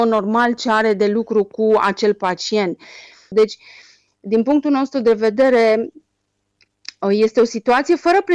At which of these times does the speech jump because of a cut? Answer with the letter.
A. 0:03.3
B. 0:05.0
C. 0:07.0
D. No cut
A